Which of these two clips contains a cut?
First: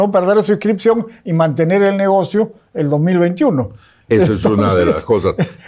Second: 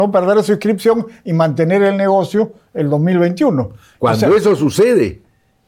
second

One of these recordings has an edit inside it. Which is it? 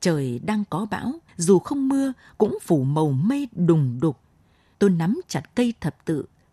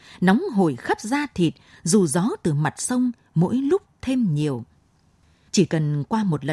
first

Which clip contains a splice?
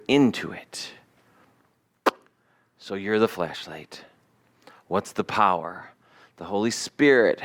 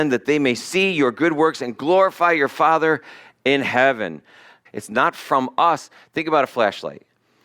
second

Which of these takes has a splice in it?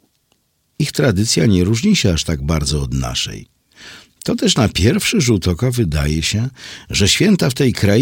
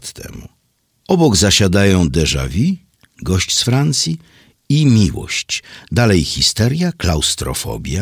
second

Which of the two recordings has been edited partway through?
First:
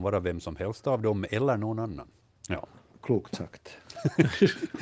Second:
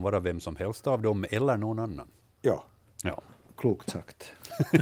first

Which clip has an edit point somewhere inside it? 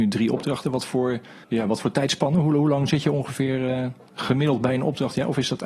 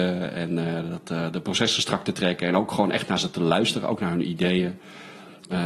first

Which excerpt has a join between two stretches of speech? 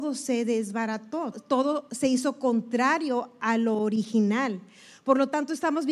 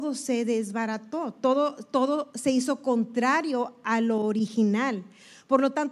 first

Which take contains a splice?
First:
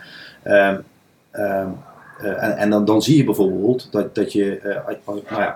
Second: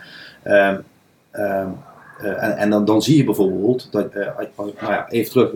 second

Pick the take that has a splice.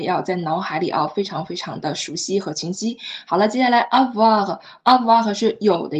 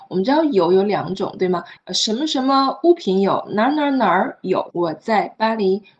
second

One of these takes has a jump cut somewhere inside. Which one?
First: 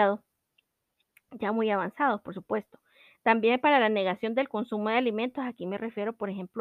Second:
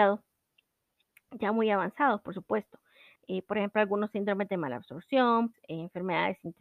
second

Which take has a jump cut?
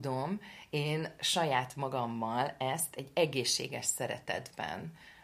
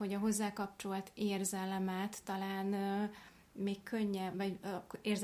second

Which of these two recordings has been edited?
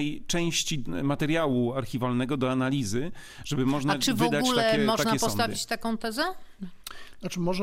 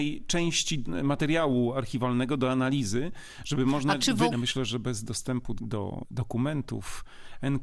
second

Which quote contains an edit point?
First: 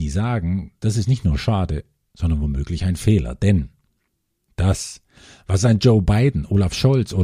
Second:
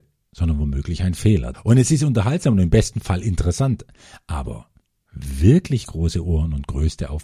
second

